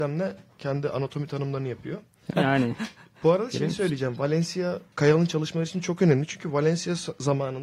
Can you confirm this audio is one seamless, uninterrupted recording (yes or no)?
no